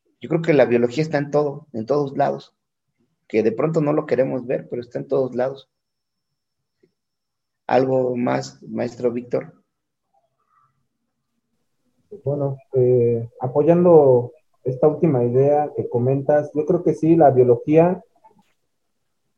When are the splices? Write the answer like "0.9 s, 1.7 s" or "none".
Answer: none